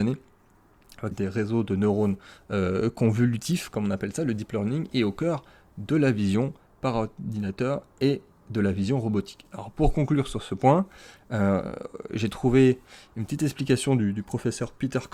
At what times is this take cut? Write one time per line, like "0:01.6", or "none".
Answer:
0:01.1